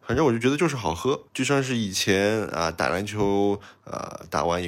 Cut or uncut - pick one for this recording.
cut